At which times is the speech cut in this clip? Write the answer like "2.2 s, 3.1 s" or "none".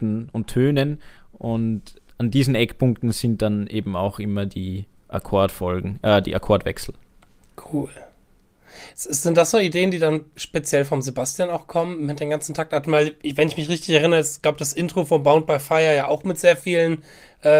none